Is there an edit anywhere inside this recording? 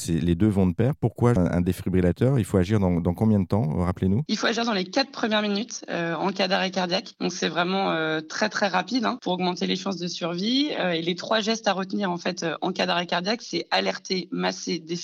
yes; 1 cut; at 1.4 s

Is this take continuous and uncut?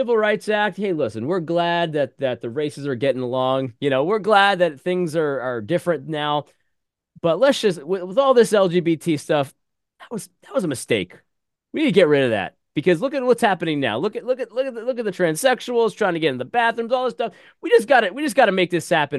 yes; 0 cuts

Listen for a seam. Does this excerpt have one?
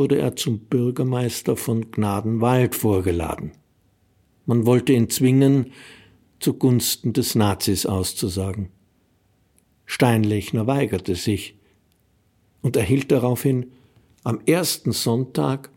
no; 0 cuts

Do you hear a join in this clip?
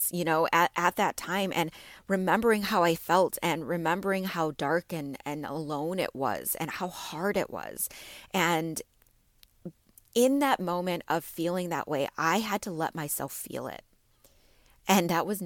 no; 0 cuts

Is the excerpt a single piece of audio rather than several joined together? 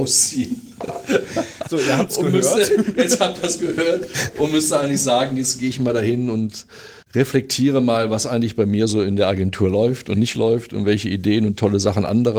no; 1 cut; at 7.0 s

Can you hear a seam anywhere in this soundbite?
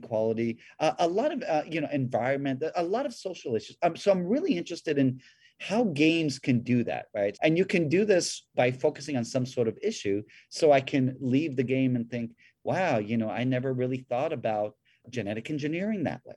yes; 1 cut; at 7.3 s

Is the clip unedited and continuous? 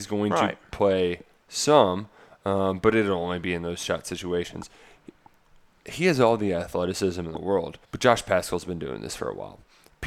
no; 1 cut; at 7.8 s

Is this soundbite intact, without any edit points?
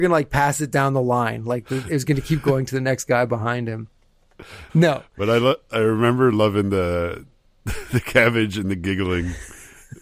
no; 1 cut; at 4.7 s

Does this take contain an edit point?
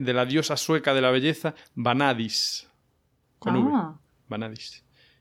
no; 0 cuts

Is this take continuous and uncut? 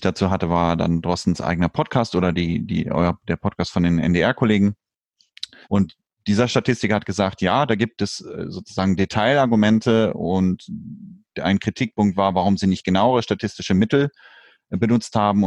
no; 1 cut; at 5.6 s

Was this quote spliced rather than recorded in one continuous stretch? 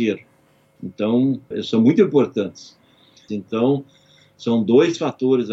yes; 2 cuts; at 1.5 s, 3.3 s

